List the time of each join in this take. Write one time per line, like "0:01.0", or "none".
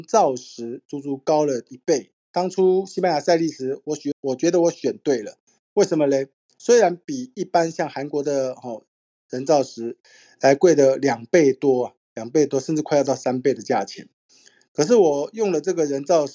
0:02.1
0:04.1